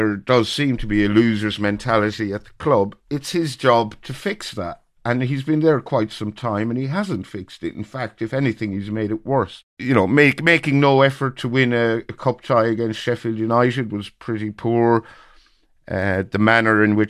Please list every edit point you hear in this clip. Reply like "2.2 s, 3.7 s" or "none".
none